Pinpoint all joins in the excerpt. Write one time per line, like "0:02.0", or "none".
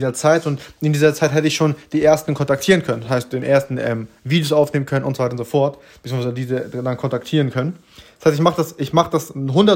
none